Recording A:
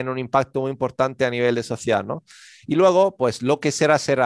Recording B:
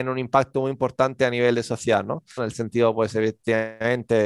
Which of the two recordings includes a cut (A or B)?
B